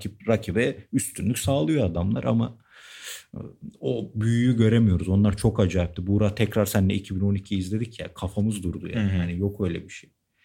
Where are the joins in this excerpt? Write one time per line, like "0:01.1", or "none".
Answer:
none